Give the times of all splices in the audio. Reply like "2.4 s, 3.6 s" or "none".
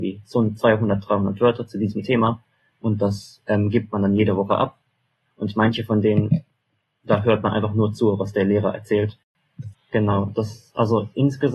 5.3 s, 9.7 s